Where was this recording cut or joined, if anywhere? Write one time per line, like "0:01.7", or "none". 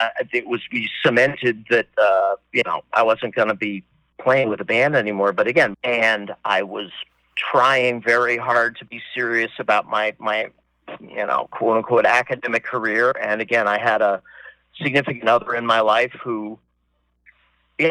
0:05.7